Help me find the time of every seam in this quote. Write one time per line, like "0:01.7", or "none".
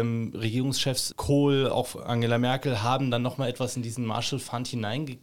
0:01.1

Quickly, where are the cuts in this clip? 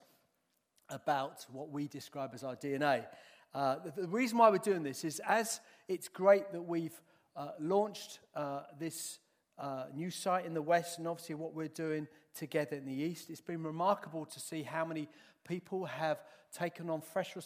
none

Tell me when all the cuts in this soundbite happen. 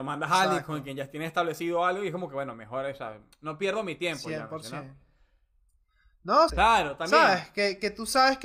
0:03.3
0:06.5

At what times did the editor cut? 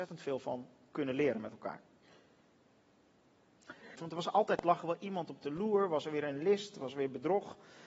0:03.9

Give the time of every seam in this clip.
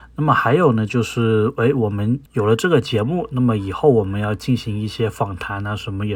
0:02.3

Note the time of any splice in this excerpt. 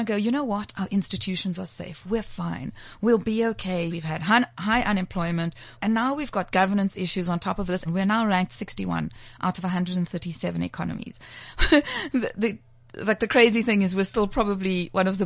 0:03.9
0:05.7
0:07.8

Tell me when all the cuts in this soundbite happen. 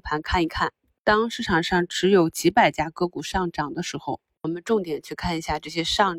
none

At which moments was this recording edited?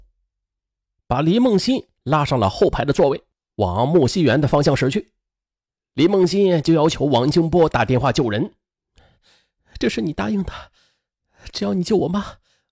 0:01.0

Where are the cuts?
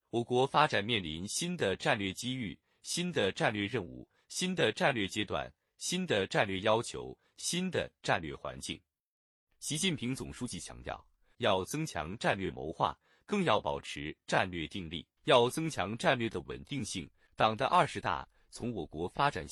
0:11.3
0:15.2
0:17.3

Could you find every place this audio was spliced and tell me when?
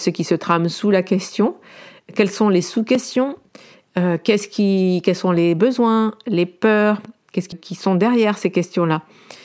0:07.5

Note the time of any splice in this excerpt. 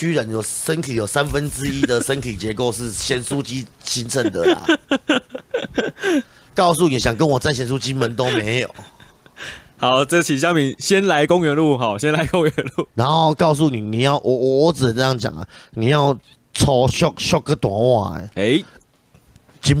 none

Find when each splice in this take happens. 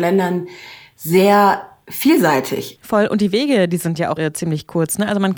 0:02.7
0:04.2

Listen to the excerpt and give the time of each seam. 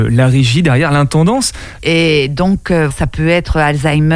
0:01.8
0:02.9

